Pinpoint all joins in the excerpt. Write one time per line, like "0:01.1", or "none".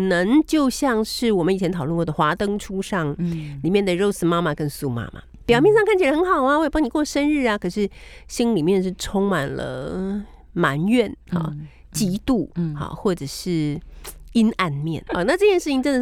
0:15.1